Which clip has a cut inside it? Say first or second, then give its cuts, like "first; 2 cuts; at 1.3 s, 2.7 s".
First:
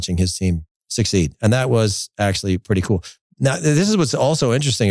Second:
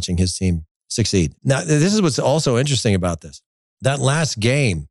second; 1 cut; at 1.4 s